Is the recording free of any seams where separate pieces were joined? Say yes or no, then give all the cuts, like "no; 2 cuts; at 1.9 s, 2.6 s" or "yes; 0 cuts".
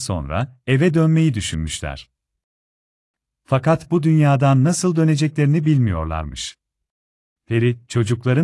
no; 1 cut; at 7.4 s